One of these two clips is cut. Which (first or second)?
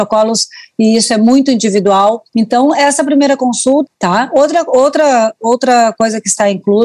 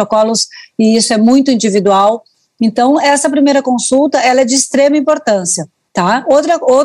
first